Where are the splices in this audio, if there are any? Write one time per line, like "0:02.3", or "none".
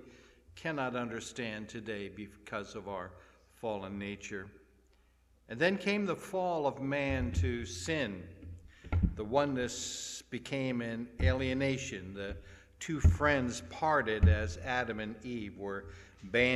none